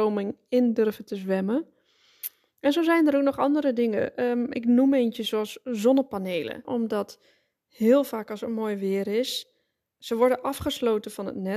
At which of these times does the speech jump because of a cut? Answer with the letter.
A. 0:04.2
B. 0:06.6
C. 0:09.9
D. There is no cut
B